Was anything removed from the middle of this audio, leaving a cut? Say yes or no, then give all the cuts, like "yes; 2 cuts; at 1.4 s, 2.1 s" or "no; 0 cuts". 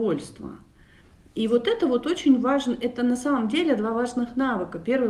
no; 0 cuts